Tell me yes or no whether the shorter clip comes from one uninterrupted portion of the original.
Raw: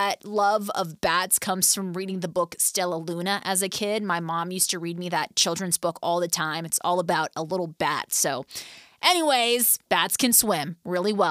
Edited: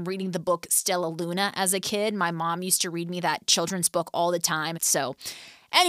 no